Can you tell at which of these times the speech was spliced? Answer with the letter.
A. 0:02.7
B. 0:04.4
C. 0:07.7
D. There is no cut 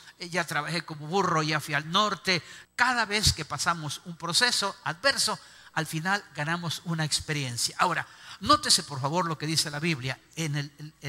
A